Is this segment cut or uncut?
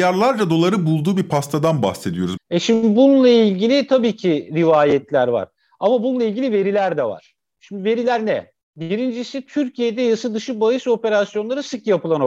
cut